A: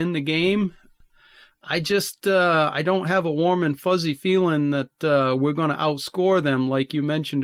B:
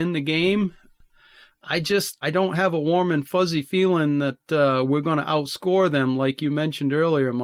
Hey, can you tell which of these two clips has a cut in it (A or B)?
B